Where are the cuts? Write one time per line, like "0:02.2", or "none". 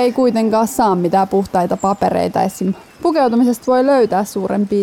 0:02.9